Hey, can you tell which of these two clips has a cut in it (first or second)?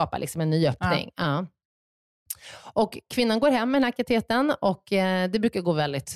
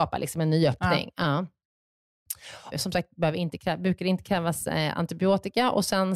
second